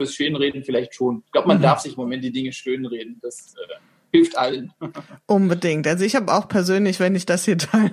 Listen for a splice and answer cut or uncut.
uncut